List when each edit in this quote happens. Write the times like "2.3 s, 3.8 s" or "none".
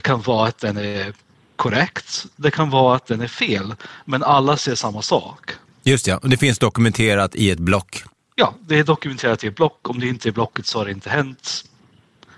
none